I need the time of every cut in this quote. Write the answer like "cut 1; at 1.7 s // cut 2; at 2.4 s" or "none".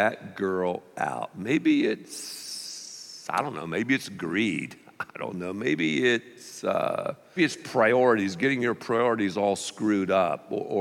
cut 1; at 7.4 s